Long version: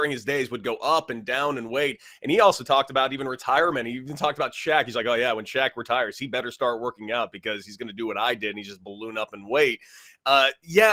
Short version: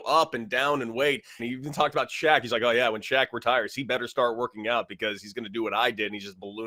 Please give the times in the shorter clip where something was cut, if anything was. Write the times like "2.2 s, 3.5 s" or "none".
1.4 s